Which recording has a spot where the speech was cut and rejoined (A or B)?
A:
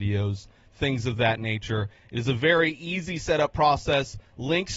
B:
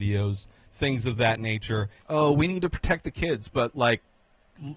B